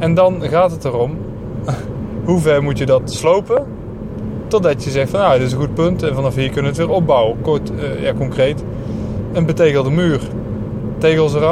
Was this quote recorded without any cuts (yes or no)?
yes